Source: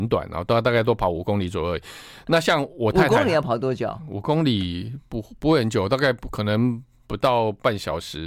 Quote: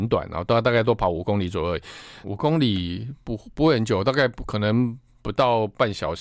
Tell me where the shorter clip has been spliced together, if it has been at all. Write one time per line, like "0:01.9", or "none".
0:02.2